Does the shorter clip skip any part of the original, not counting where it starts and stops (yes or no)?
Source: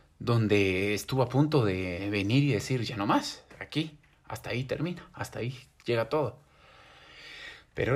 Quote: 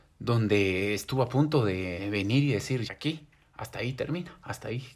yes